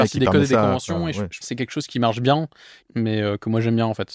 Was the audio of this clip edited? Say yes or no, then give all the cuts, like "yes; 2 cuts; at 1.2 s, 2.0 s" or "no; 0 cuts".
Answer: yes; 2 cuts; at 1.4 s, 2.8 s